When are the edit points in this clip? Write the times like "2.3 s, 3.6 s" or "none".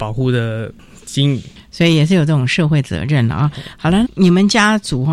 4.0 s